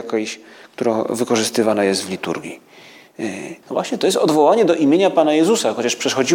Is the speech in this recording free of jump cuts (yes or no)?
no